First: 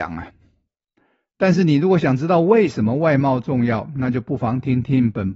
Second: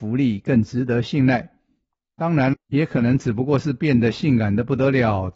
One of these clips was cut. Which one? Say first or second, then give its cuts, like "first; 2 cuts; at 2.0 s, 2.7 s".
second; 1 cut; at 2.5 s